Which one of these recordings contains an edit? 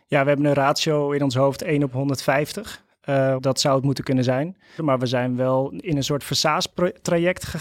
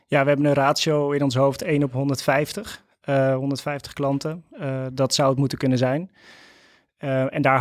first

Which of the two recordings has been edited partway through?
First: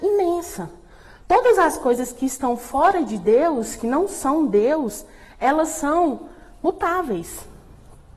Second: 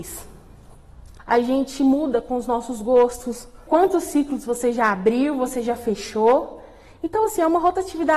second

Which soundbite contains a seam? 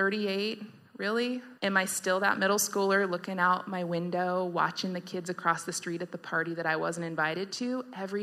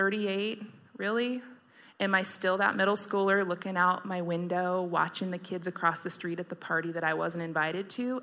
first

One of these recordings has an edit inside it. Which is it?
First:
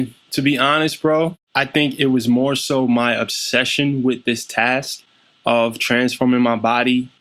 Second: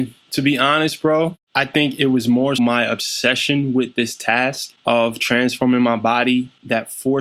second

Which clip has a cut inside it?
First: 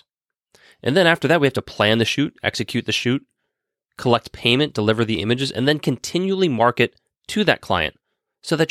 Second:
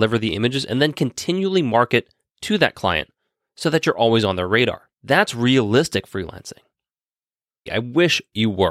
second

